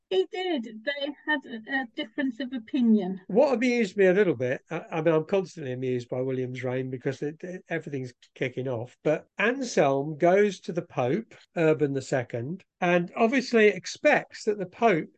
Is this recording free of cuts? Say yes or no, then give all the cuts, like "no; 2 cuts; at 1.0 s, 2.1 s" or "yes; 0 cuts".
yes; 0 cuts